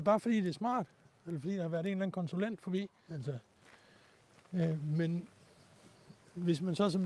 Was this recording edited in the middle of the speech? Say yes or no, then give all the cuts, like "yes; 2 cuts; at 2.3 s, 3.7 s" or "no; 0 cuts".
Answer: yes; 1 cut; at 3.1 s